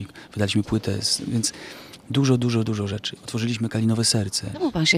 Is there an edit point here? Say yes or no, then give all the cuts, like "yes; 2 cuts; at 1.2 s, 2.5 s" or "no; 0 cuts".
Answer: no; 0 cuts